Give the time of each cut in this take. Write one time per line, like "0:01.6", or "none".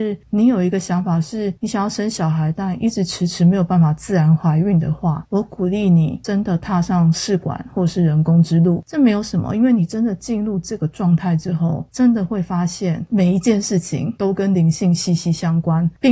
none